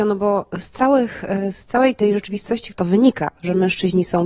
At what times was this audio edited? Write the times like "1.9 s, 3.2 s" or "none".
2.7 s